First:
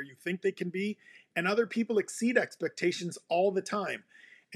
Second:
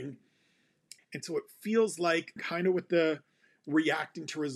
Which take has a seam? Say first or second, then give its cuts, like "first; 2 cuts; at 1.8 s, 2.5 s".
second; 2 cuts; at 1.0 s, 2.4 s